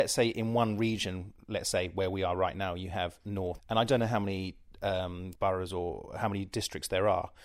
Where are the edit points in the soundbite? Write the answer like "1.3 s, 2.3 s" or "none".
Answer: 3.6 s, 5.4 s